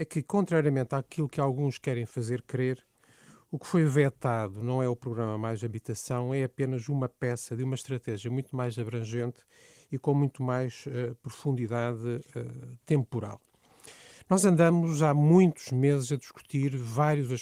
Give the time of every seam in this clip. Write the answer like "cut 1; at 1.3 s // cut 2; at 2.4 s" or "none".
none

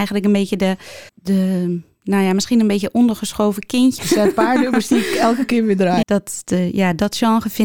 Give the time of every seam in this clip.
cut 1; at 1.1 s // cut 2; at 4.0 s // cut 3; at 6.0 s

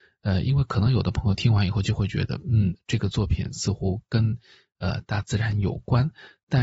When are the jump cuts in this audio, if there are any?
none

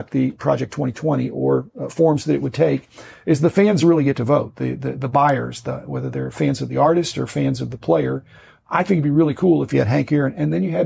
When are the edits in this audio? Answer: none

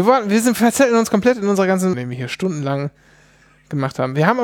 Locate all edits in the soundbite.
cut 1; at 1.9 s

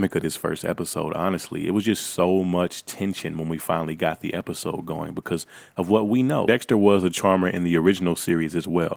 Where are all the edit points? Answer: cut 1; at 6.5 s

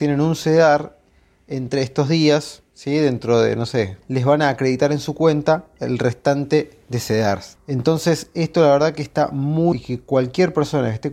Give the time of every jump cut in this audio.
cut 1; at 4.0 s // cut 2; at 7.6 s // cut 3; at 9.7 s

